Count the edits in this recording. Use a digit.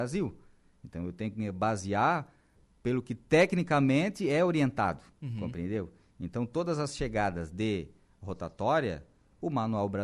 2